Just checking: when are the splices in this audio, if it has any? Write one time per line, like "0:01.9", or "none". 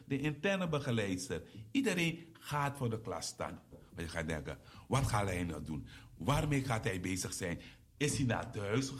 0:03.7